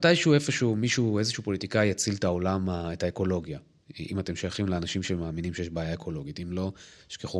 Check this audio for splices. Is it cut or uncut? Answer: uncut